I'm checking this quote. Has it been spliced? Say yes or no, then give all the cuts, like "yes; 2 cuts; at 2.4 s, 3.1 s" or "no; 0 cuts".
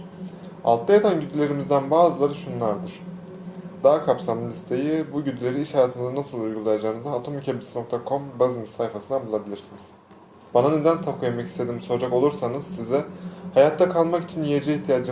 yes; 2 cuts; at 3.8 s, 10.5 s